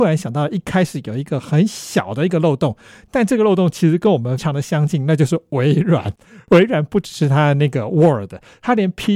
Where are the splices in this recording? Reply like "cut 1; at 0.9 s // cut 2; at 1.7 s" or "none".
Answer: cut 1; at 4.4 s